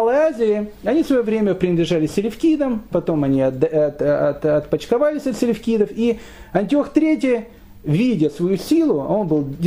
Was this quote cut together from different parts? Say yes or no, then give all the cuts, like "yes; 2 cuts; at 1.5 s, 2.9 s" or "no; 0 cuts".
no; 0 cuts